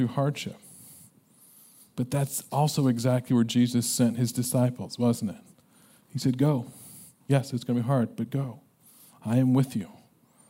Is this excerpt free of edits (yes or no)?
yes